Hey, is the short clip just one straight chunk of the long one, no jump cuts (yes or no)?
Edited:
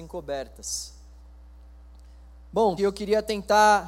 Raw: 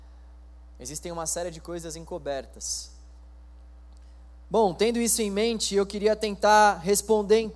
no